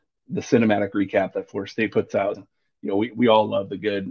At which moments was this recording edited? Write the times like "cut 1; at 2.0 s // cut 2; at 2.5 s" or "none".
cut 1; at 2.3 s